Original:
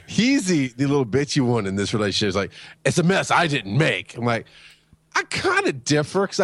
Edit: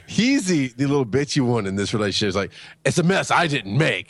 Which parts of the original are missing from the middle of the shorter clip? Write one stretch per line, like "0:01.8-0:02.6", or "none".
none